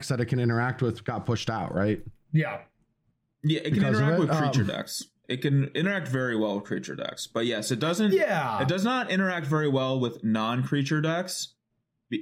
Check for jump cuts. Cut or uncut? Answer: uncut